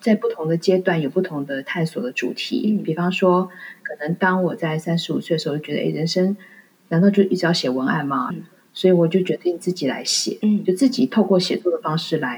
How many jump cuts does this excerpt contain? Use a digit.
1